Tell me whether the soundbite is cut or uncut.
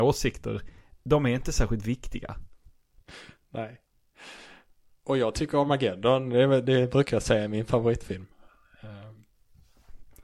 uncut